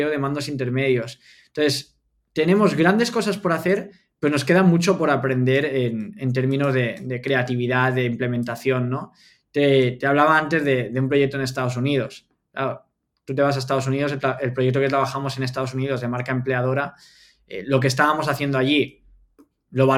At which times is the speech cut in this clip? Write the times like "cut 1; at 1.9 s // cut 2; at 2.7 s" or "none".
none